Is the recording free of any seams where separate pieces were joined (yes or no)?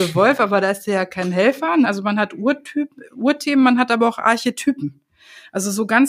no